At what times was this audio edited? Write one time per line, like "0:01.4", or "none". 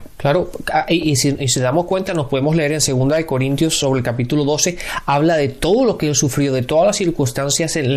none